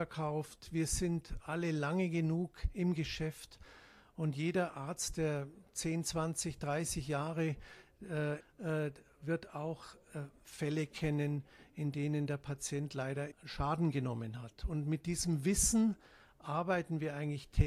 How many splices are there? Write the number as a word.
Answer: two